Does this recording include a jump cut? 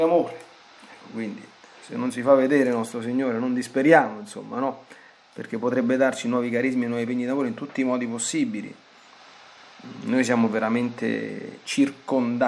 no; 0 cuts

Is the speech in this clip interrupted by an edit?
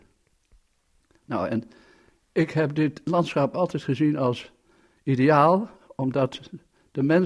no; 0 cuts

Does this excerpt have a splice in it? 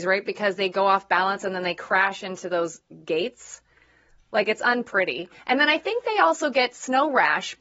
no; 0 cuts

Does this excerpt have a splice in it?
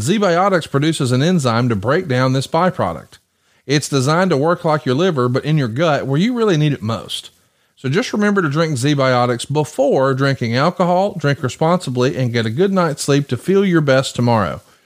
no; 0 cuts

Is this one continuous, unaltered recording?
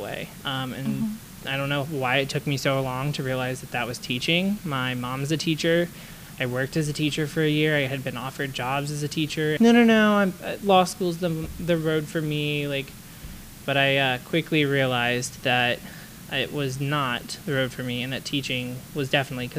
no; 1 cut; at 9.6 s

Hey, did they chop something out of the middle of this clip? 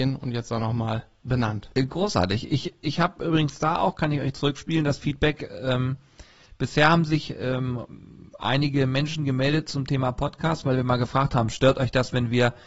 no; 0 cuts

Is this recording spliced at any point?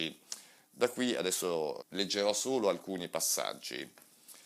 yes; 1 cut; at 1.8 s

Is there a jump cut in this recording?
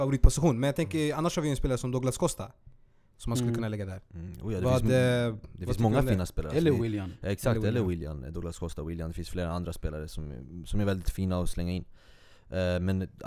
no; 0 cuts

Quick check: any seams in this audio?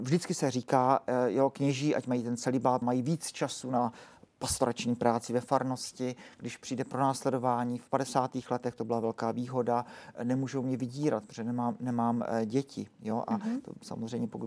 yes; 1 cut; at 2.8 s

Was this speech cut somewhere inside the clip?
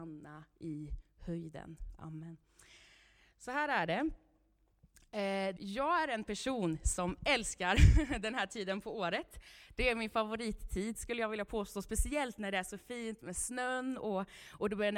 yes; 1 cut; at 5.6 s

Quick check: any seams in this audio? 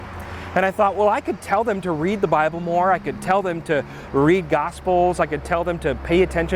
no; 0 cuts

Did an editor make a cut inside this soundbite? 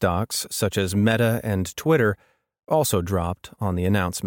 no; 0 cuts

